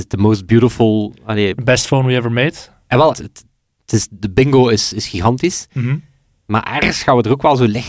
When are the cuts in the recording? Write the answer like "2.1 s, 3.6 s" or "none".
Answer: 3.1 s